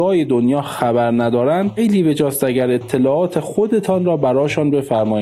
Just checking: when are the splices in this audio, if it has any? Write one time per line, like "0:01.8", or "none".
0:01.8